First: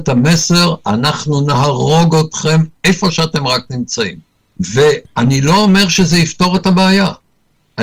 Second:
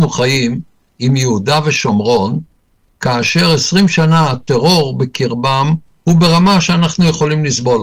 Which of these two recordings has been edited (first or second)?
first